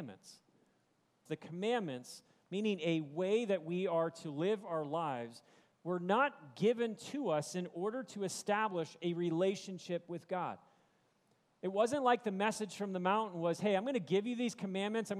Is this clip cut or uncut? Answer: cut